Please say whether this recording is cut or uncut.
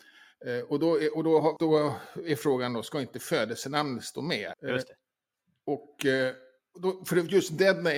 cut